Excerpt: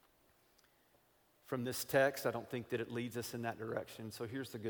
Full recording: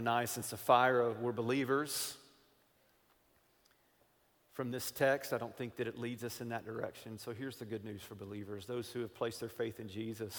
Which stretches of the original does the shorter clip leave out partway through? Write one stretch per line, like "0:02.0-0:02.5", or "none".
none